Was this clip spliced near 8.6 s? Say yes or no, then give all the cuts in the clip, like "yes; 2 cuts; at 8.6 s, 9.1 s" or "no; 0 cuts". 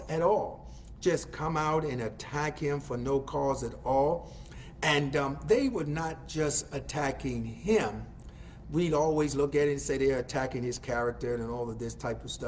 yes; 1 cut; at 8.6 s